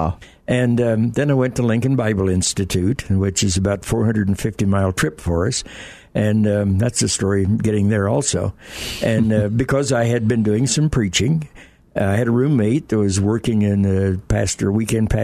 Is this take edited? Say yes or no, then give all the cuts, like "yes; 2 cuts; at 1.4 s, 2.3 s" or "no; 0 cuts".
no; 0 cuts